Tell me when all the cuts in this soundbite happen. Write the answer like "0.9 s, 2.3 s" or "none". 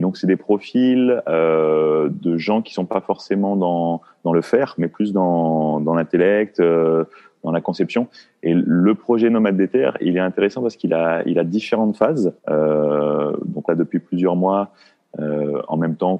12.4 s, 13.7 s